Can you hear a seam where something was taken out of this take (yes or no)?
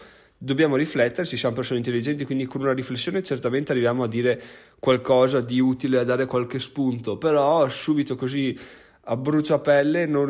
no